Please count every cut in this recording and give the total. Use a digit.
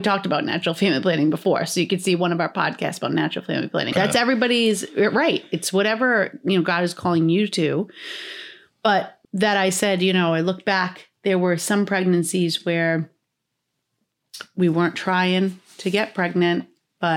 2